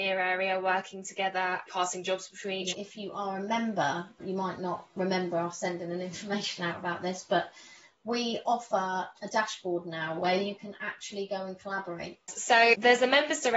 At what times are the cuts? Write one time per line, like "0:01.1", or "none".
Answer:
0:02.7